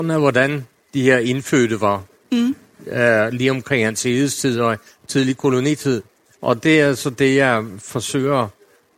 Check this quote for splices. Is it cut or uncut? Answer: uncut